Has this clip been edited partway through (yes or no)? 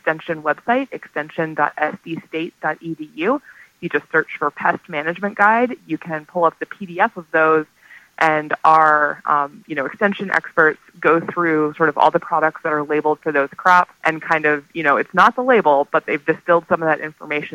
yes